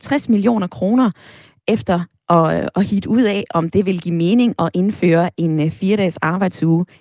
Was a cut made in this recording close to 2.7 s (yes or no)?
no